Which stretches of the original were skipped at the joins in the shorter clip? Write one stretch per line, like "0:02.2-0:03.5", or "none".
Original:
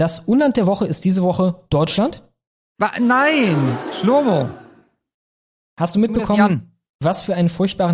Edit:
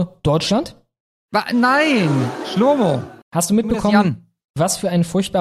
0:04.7-0:05.7